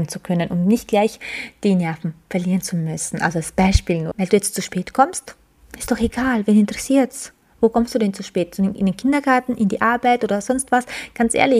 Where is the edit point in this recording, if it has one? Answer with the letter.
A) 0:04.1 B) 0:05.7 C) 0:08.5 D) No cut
A